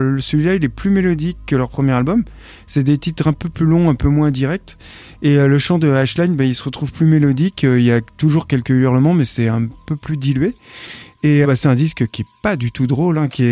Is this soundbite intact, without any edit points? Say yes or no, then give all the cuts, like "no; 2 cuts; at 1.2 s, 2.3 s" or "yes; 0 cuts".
no; 1 cut; at 11.4 s